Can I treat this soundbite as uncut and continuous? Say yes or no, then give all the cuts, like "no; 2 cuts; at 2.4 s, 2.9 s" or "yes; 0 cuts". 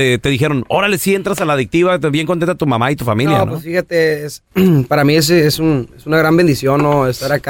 yes; 0 cuts